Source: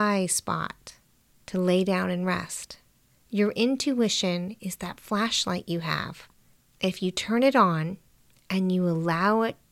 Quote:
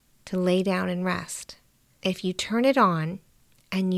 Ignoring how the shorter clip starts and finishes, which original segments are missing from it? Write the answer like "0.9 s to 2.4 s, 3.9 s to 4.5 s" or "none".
3.2 s to 6.8 s